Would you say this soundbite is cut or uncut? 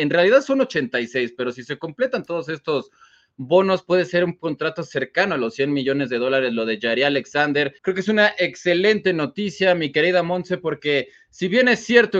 cut